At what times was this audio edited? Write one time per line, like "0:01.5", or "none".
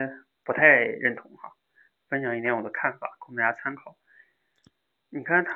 none